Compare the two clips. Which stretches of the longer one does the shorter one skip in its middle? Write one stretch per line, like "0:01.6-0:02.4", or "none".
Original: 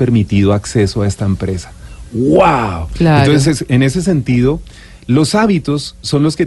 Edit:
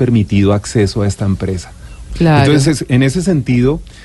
0:02.1-0:02.9